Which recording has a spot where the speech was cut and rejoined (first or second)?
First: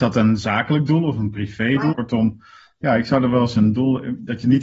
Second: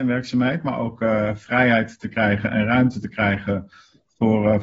first